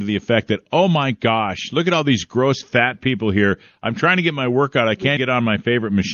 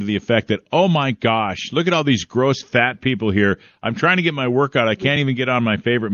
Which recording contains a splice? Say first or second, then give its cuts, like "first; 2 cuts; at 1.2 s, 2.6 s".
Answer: first; 1 cut; at 5.2 s